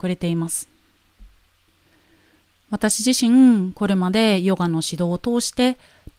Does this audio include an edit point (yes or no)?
no